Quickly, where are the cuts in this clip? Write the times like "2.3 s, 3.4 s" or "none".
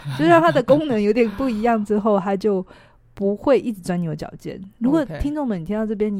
none